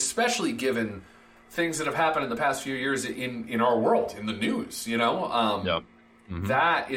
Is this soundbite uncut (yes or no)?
yes